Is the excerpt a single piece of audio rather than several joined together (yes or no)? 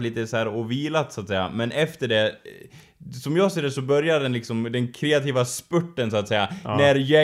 yes